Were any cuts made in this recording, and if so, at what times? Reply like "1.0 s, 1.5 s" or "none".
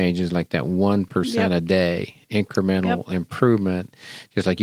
none